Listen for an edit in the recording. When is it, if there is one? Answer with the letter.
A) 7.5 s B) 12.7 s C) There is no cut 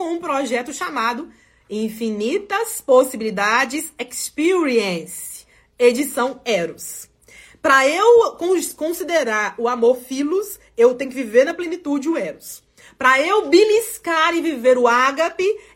C